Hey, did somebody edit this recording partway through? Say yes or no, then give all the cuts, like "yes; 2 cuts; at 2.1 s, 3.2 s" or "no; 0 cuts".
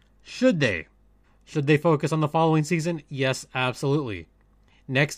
yes; 1 cut; at 1.2 s